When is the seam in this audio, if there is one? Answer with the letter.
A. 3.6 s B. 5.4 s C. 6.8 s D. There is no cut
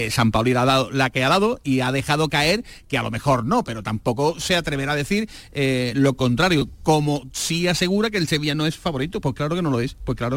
A